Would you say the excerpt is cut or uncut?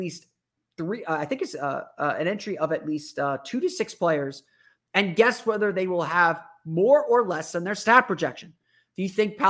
uncut